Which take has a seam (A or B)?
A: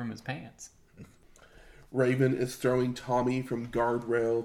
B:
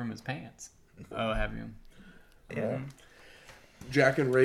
B